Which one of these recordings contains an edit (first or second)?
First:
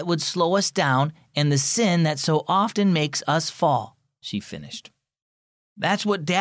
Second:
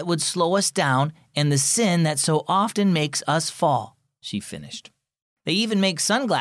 second